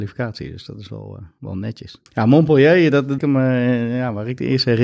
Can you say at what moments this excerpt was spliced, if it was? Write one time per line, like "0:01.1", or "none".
0:02.1
0:03.2